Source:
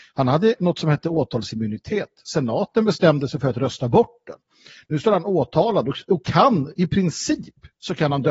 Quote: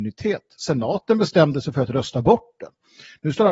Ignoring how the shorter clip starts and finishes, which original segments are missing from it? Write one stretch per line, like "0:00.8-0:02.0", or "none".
none